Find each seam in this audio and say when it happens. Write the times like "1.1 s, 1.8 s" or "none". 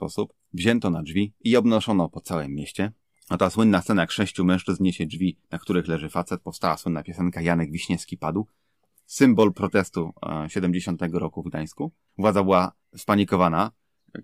none